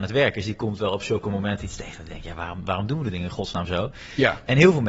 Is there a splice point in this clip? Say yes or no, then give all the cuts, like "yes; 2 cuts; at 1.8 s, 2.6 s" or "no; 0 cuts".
no; 0 cuts